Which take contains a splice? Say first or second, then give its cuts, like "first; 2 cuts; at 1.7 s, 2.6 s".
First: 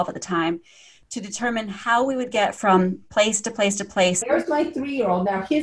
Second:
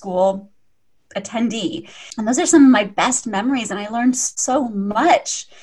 first; 1 cut; at 4.2 s